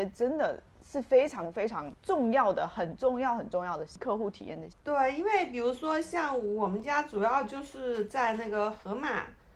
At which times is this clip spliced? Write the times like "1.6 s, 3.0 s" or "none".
none